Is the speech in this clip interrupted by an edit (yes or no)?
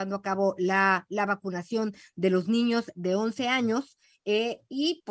no